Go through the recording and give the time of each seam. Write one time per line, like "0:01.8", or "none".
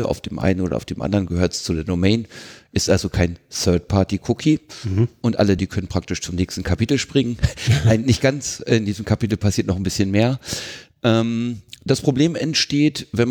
0:05.6